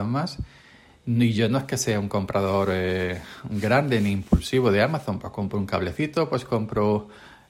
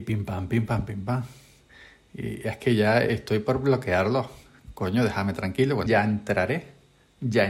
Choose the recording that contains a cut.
second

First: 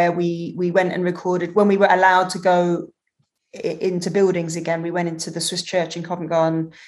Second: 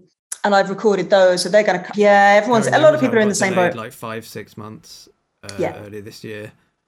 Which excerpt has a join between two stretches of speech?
second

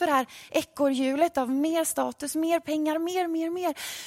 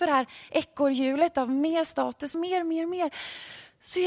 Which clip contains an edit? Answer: second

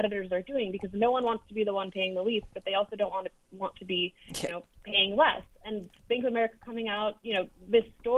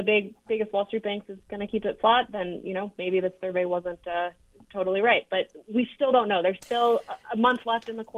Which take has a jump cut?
first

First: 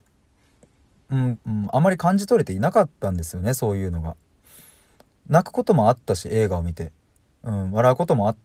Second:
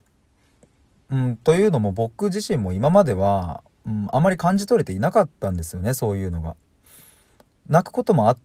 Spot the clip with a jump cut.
first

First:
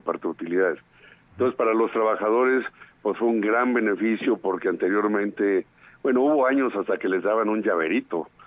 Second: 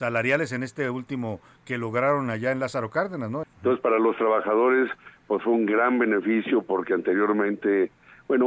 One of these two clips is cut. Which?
second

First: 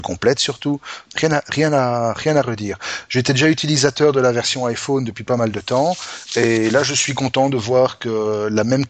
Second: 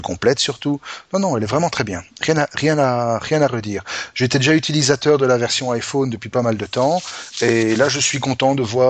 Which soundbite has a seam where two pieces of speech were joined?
first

